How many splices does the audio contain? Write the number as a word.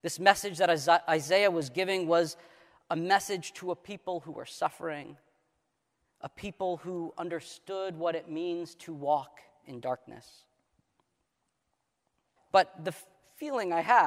one